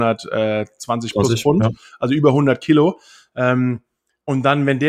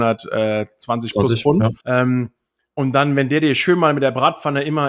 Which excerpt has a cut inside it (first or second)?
second